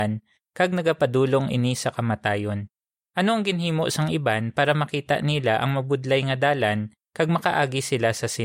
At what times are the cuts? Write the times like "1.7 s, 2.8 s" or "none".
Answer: 3.0 s